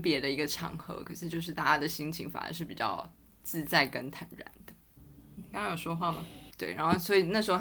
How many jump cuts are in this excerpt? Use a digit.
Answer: 1